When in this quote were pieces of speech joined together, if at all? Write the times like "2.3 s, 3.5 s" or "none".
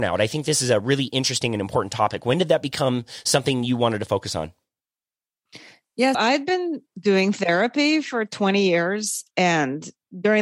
6.1 s